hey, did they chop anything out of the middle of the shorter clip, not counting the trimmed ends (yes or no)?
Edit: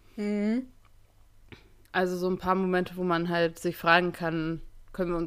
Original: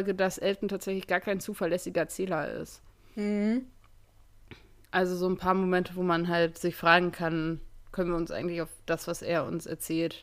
no